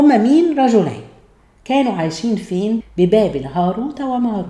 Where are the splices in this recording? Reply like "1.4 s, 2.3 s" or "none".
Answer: 2.8 s